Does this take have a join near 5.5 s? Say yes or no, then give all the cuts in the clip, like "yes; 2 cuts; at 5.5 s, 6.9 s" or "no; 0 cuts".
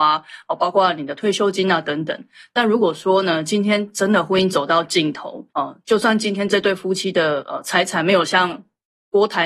yes; 1 cut; at 5.5 s